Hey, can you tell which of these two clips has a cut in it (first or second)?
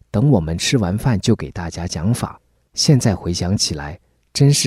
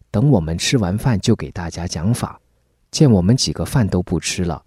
first